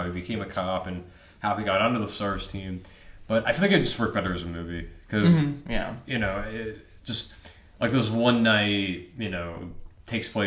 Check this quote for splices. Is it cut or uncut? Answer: uncut